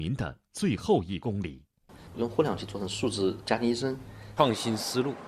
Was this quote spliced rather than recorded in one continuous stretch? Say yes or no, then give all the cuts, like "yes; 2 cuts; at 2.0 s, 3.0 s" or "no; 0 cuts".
yes; 1 cut; at 4.4 s